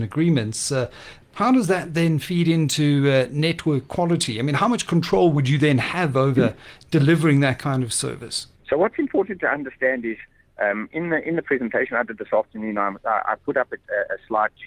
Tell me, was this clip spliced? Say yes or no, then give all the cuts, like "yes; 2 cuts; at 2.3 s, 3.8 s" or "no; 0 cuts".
no; 0 cuts